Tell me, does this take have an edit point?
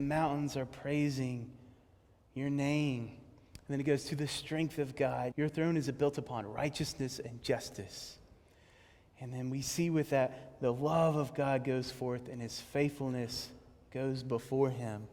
yes; 1 cut; at 5.3 s

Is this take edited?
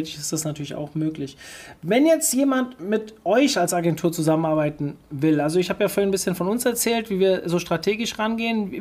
no; 0 cuts

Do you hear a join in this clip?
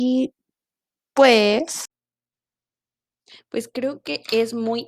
no; 0 cuts

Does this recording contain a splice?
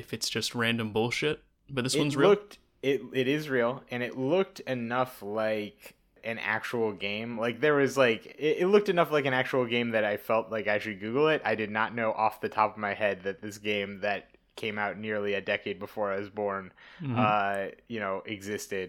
no; 0 cuts

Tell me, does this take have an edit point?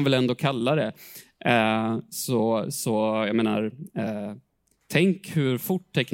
no; 0 cuts

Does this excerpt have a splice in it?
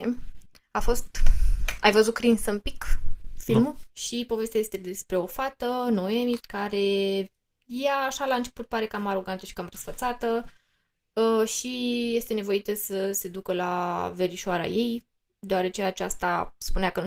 yes; 2 cuts; at 3.9 s, 6.4 s

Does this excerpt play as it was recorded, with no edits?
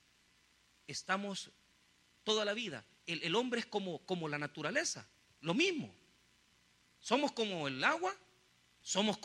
yes; 0 cuts

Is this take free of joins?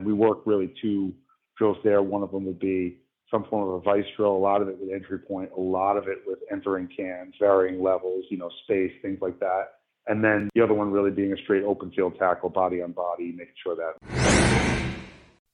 yes; 0 cuts

